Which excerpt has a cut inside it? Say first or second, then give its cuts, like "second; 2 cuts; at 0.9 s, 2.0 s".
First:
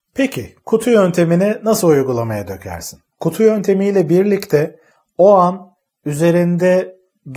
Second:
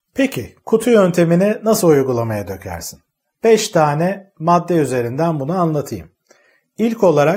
first; 1 cut; at 3.1 s